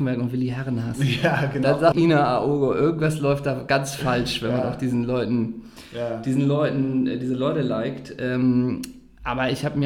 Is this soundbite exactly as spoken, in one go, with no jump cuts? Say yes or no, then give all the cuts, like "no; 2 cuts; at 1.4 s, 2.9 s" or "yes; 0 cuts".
no; 1 cut; at 1.9 s